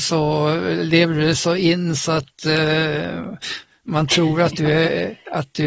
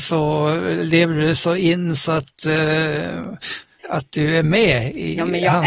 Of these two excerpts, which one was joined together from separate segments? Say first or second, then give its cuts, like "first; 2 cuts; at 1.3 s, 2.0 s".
second; 1 cut; at 3.8 s